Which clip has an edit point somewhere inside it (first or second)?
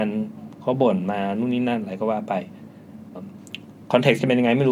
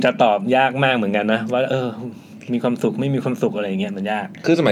first